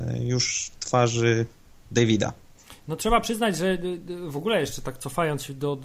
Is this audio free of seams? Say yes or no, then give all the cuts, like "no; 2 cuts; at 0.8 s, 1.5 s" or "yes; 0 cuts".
yes; 0 cuts